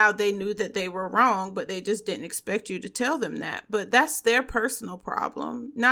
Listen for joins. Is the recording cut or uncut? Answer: uncut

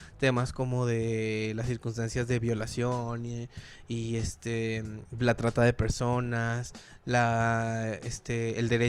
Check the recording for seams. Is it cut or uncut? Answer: uncut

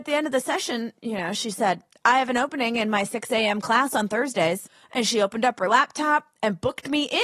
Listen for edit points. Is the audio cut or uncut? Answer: uncut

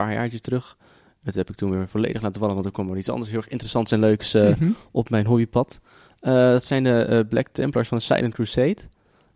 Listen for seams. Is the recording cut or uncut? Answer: uncut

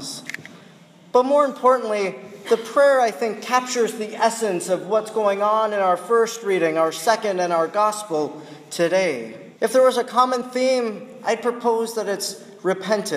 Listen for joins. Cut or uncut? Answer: cut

